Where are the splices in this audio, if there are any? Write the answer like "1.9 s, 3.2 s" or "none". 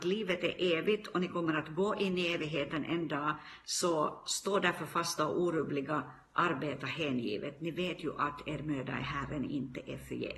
none